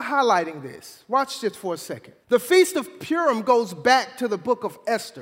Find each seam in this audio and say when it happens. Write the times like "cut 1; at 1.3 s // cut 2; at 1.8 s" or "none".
cut 1; at 2.2 s